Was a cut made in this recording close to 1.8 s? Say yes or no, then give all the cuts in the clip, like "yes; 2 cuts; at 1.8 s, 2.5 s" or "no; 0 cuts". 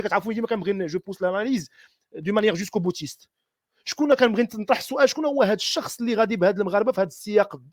no; 0 cuts